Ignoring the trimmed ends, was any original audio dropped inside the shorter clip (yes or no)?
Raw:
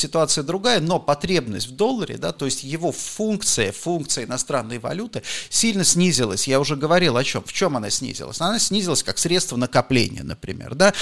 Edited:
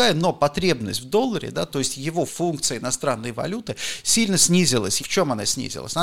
yes